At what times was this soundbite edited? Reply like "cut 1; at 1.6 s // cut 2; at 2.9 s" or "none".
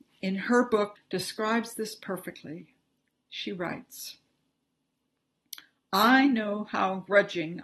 cut 1; at 0.9 s

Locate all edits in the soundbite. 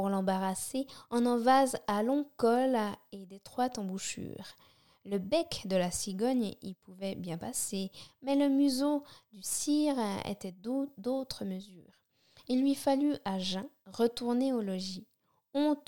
none

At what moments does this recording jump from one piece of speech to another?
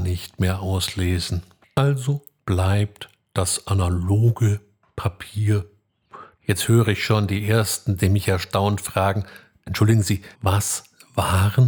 cut 1; at 6.4 s // cut 2; at 10.3 s

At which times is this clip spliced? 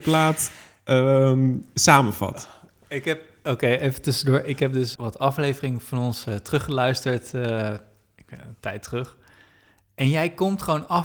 cut 1; at 4.9 s

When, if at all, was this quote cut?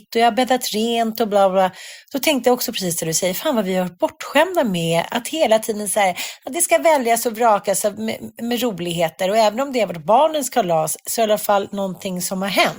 none

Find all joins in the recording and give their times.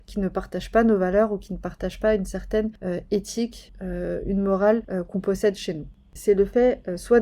cut 1; at 6.2 s

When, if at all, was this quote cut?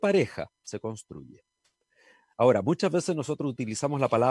none

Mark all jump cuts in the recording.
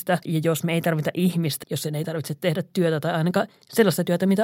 cut 1; at 1.6 s

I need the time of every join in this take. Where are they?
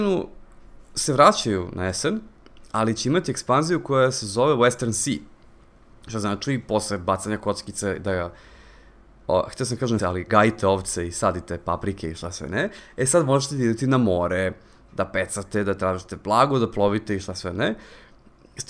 cut 1; at 10.0 s

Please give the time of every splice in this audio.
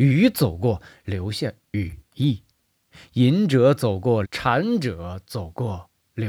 cut 1; at 4.2 s

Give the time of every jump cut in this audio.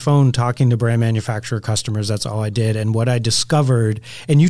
none

